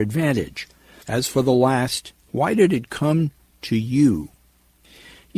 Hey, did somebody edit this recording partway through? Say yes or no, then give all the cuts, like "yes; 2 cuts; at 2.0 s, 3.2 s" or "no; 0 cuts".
yes; 2 cuts; at 1.0 s, 2.2 s